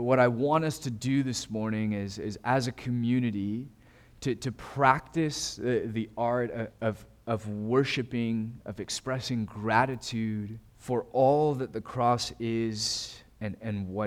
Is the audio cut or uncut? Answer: cut